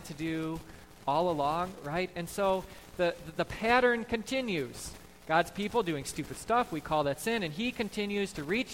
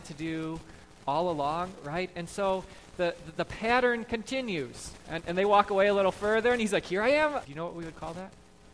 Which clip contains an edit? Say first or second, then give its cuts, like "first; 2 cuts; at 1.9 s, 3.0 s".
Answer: second; 2 cuts; at 5.0 s, 7.4 s